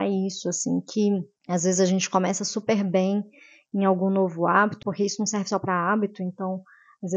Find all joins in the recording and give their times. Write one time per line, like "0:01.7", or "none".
0:04.8